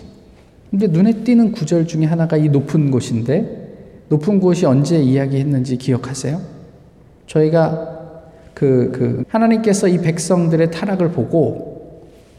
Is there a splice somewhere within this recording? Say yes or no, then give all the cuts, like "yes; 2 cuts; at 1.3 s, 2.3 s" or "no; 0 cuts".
yes; 1 cut; at 9.2 s